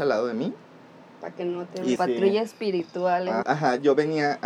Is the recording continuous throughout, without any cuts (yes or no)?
no